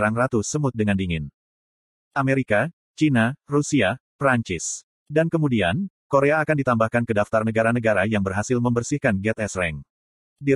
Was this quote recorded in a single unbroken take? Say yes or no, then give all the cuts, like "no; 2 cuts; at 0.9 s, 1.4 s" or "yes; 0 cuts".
yes; 0 cuts